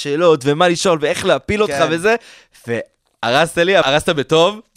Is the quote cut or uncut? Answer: cut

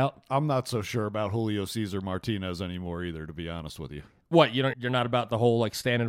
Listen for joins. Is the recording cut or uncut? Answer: cut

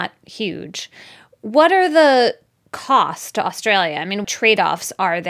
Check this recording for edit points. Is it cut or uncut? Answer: cut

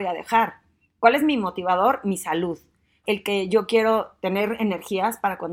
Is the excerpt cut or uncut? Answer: cut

